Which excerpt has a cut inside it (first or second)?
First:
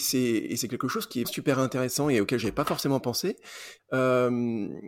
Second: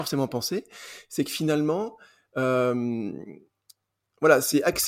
first